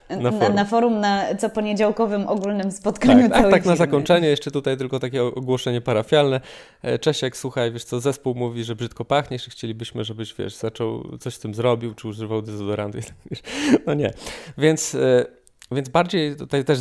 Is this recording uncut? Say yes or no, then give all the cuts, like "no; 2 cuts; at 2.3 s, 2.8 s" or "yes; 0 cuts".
yes; 0 cuts